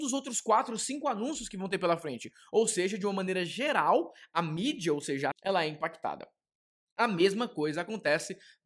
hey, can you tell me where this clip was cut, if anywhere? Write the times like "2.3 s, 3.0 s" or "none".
5.3 s